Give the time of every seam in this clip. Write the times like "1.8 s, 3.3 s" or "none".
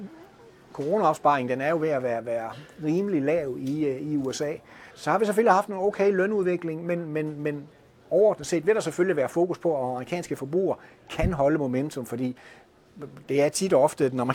4.9 s